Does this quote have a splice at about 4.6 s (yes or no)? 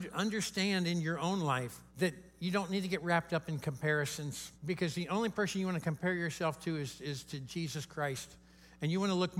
yes